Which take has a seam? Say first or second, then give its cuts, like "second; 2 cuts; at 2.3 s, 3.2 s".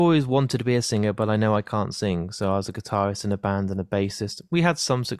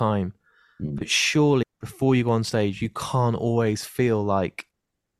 second; 1 cut; at 1.6 s